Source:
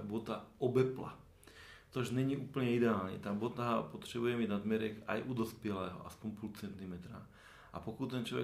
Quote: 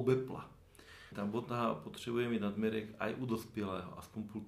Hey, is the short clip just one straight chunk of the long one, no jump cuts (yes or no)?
no